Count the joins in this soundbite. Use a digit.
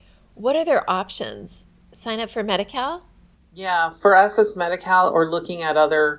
0